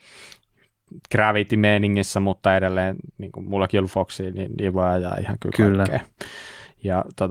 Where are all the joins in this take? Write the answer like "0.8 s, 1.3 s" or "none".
none